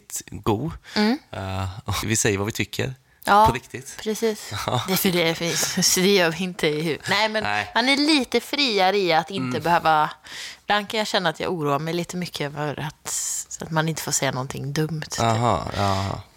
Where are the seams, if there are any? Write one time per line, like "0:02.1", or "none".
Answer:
0:02.0